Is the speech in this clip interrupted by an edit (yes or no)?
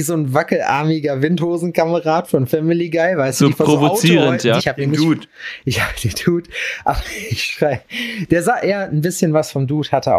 yes